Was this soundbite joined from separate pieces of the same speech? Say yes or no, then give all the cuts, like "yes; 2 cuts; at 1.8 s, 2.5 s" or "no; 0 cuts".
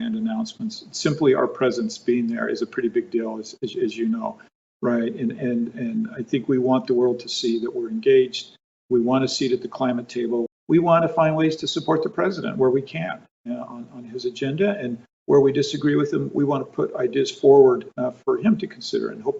yes; 1 cut; at 10.5 s